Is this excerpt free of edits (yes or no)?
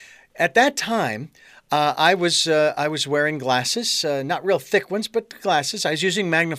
yes